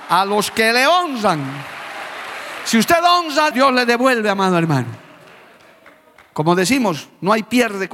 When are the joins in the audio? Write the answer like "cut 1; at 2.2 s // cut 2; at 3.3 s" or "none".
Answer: cut 1; at 3.5 s